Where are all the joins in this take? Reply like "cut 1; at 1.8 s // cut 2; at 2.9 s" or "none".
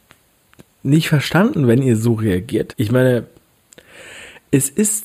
cut 1; at 2.7 s